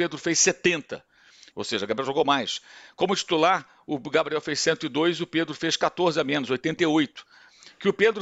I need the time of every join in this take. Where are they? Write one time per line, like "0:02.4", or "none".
0:01.5

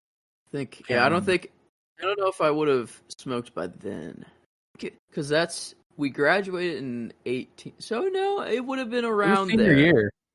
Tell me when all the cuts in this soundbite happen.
0:05.0

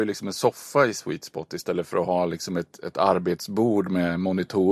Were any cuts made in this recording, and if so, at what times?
none

